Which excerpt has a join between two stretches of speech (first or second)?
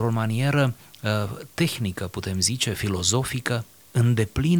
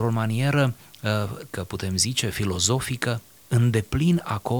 second